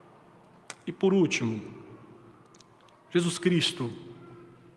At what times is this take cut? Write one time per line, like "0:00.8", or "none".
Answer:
none